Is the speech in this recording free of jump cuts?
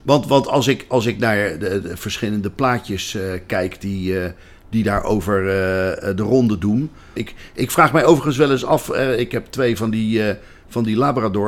no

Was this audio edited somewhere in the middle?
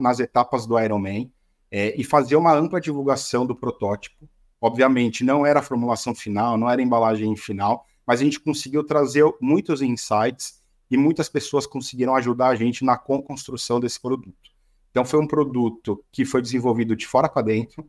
no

